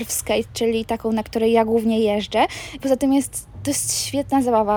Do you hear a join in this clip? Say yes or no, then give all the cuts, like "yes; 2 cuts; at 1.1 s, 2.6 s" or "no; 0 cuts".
yes; 1 cut; at 2.8 s